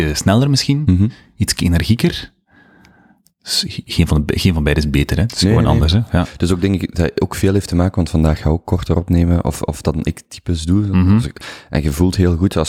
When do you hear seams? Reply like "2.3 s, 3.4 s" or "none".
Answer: none